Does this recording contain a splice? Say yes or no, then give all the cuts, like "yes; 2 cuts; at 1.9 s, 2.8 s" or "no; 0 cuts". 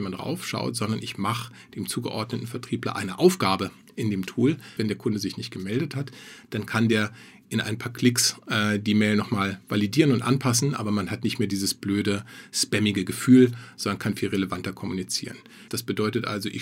yes; 2 cuts; at 4.8 s, 15.7 s